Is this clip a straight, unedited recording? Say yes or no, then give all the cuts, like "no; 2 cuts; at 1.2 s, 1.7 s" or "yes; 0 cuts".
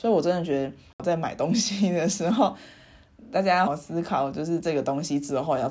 no; 1 cut; at 3.7 s